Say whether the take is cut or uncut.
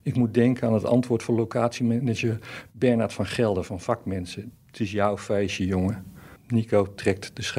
cut